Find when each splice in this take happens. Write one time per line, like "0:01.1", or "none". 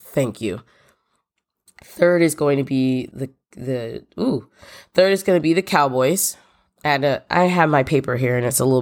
0:03.1